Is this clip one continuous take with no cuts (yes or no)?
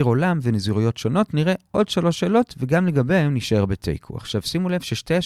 yes